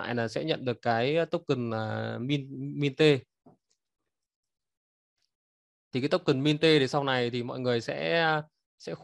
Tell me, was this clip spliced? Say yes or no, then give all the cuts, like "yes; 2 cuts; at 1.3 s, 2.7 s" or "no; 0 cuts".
no; 0 cuts